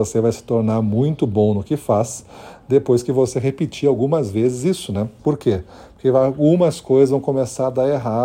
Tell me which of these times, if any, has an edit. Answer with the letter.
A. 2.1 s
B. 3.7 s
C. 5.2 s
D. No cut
C